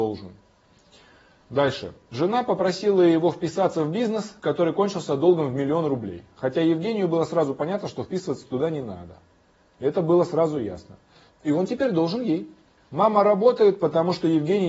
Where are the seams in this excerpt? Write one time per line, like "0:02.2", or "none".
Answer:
0:11.3
0:12.8